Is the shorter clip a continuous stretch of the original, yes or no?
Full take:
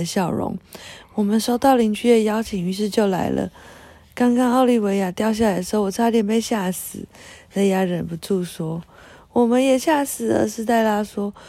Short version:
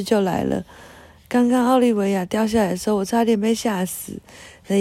yes